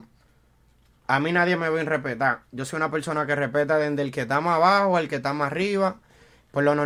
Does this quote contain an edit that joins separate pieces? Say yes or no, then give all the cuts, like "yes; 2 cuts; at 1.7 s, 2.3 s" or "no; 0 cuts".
no; 0 cuts